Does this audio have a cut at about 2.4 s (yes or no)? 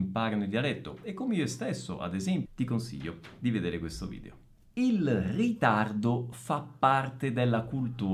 yes